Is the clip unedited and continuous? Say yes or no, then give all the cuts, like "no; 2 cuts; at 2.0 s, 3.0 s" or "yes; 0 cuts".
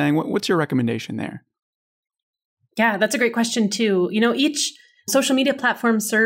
yes; 0 cuts